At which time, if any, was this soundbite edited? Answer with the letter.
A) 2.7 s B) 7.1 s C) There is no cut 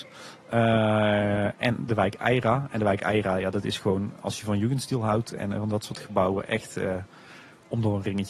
C